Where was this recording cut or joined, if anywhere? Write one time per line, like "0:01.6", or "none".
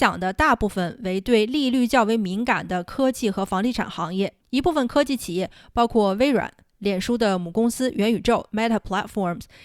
0:04.4